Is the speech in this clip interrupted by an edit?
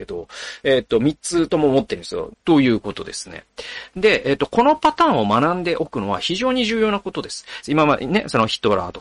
yes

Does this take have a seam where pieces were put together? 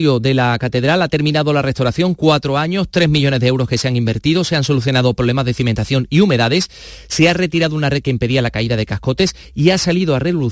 no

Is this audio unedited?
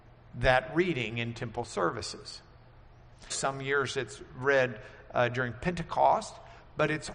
no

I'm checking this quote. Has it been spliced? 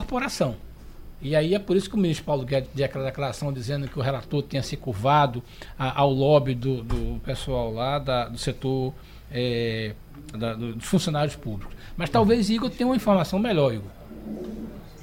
yes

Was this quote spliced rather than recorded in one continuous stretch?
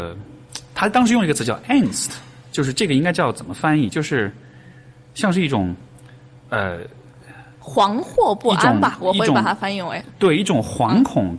no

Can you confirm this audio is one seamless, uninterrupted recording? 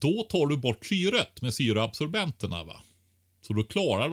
yes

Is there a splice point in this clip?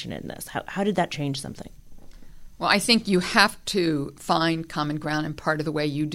no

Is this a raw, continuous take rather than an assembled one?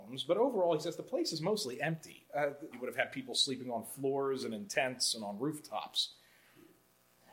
no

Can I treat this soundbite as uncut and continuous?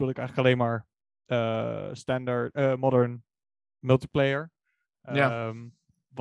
yes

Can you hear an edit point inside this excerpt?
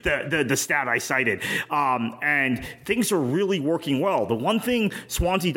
no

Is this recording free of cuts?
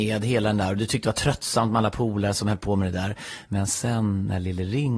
yes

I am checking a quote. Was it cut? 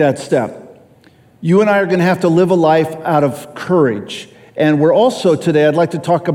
no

